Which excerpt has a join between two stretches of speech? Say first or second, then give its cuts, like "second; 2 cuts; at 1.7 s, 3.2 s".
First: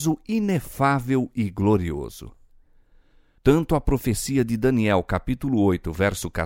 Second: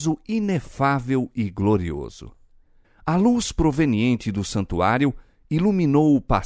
second; 1 cut; at 2.8 s